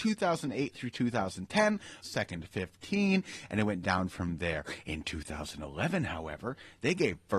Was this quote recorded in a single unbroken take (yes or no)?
no